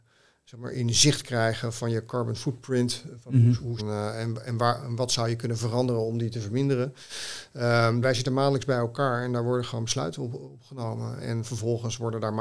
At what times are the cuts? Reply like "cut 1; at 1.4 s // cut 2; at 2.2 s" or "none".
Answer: cut 1; at 3.8 s // cut 2; at 8.0 s // cut 3; at 11.2 s